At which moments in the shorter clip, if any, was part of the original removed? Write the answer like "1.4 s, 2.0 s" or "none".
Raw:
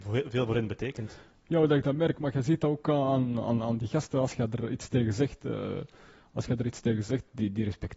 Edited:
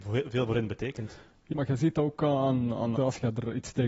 1.5 s, 3.0 s